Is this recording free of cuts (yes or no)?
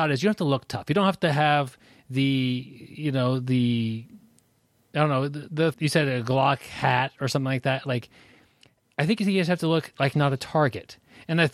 no